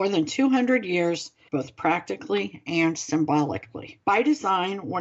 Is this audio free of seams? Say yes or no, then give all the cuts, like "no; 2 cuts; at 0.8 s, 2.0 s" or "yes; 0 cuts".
no; 2 cuts; at 1.5 s, 4.0 s